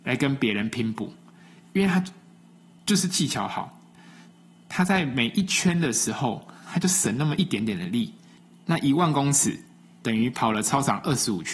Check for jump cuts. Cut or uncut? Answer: uncut